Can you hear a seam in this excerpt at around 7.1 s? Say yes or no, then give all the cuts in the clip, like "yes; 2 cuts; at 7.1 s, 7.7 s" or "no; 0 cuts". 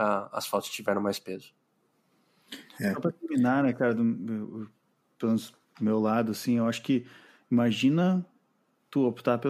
no; 0 cuts